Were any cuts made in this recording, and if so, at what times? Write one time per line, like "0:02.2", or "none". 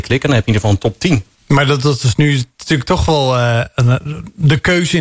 0:01.4